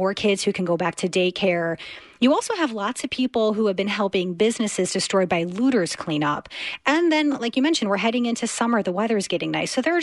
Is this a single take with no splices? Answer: yes; 0 cuts

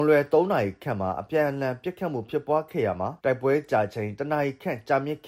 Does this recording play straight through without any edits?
no; 1 cut; at 3.2 s

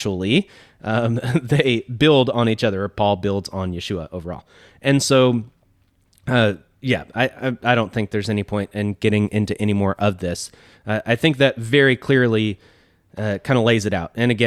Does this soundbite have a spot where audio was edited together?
no; 0 cuts

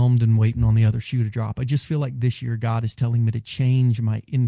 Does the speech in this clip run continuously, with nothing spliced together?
yes; 0 cuts

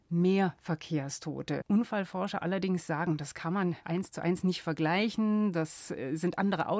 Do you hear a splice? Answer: yes; 2 cuts; at 1.6 s, 3.8 s

